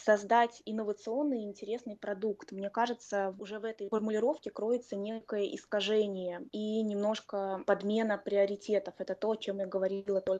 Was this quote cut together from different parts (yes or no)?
no